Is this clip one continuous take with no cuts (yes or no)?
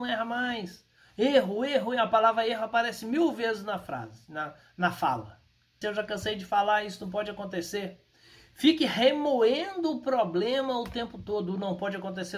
no